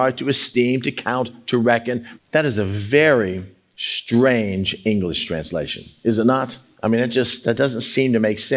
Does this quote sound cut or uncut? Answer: cut